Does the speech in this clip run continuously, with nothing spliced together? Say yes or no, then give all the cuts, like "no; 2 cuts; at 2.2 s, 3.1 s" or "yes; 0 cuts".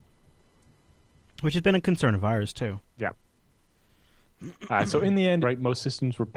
no; 1 cut; at 5.4 s